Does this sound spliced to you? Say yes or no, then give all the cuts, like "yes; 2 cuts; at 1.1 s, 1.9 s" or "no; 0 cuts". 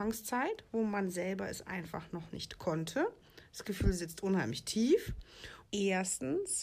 yes; 1 cut; at 5.7 s